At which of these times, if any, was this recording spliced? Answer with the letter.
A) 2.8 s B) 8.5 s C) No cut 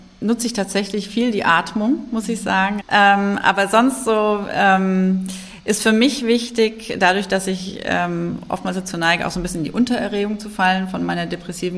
A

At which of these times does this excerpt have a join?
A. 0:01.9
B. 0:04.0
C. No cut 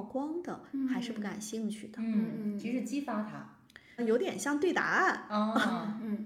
B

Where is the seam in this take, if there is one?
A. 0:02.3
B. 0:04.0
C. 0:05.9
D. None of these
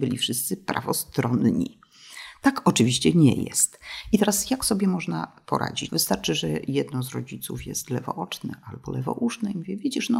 C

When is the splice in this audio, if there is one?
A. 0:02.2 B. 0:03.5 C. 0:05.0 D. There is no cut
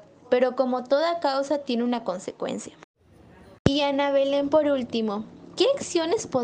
B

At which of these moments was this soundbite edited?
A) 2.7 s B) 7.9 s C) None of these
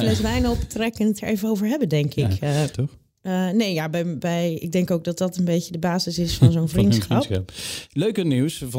A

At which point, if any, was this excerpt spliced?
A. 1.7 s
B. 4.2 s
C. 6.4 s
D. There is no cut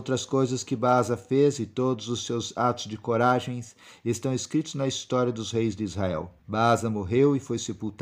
C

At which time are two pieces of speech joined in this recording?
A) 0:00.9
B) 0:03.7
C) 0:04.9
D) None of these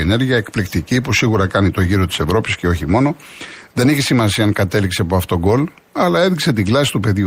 D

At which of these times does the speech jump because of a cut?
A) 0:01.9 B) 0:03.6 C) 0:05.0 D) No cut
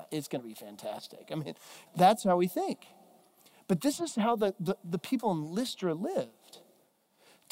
A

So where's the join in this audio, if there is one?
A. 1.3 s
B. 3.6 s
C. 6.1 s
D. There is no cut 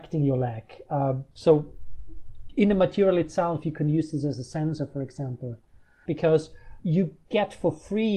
C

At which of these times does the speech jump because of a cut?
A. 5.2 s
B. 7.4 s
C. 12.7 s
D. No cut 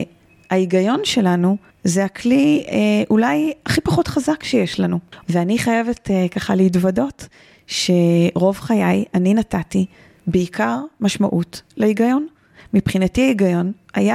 A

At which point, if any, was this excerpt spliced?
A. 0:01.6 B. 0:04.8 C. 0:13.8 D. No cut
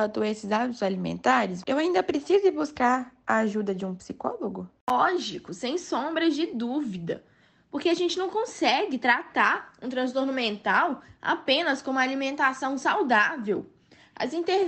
A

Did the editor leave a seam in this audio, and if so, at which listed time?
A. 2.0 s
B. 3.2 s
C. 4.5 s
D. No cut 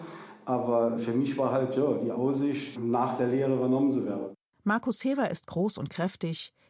C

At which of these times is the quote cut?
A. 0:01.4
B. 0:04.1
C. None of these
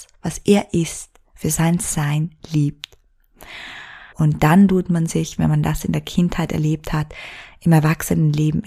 B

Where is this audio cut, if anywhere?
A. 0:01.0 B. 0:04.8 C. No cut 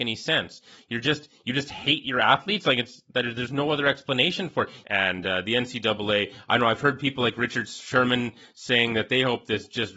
B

